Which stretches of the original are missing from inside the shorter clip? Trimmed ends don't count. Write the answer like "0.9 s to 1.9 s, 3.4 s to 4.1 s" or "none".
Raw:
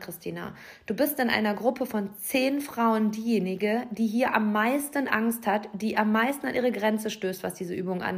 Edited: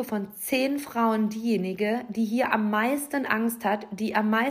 none